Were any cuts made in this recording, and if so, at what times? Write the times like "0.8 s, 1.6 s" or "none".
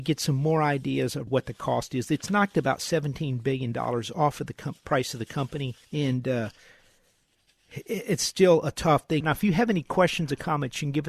1.3 s, 5.8 s, 9.2 s

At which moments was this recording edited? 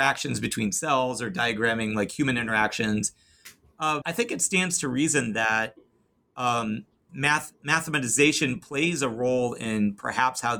4.0 s, 7.1 s

